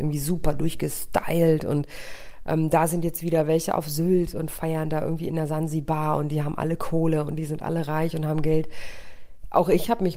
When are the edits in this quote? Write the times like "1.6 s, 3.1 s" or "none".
none